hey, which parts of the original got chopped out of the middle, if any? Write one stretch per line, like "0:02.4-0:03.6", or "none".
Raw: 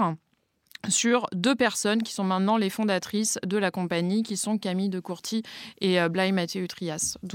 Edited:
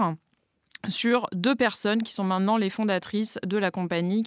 none